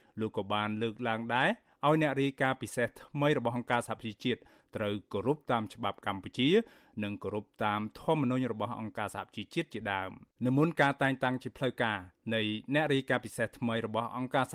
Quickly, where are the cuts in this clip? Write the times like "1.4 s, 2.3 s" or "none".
10.4 s